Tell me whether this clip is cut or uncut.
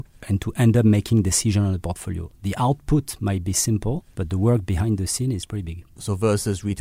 uncut